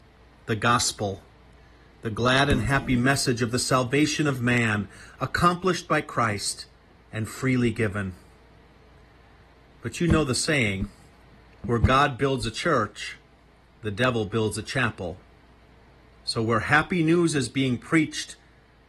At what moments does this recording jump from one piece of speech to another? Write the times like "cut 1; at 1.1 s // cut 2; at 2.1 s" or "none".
none